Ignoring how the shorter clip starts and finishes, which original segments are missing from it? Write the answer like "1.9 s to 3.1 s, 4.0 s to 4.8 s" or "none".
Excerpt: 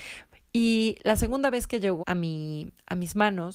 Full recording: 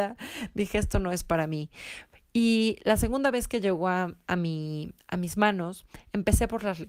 3.8 s to 4.2 s